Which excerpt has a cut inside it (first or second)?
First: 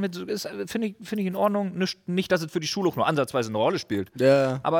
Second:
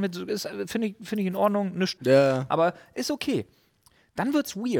second